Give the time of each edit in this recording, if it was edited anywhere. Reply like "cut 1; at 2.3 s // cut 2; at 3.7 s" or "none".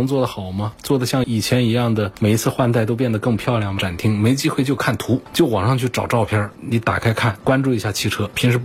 cut 1; at 3.8 s